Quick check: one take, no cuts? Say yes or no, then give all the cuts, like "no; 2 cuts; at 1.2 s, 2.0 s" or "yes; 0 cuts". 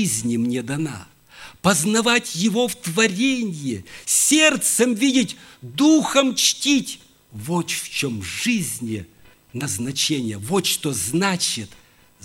yes; 0 cuts